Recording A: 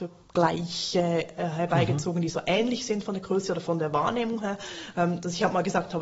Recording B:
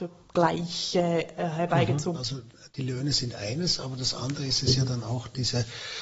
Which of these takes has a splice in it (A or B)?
B